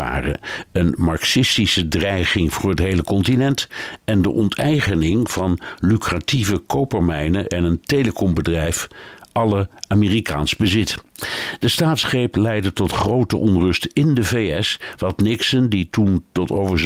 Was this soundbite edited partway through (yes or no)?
no